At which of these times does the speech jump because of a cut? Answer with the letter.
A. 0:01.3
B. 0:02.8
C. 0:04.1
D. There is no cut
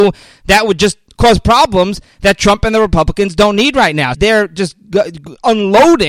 C